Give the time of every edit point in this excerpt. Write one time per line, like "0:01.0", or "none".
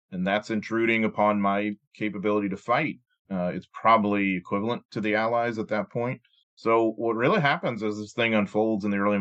0:03.3
0:06.4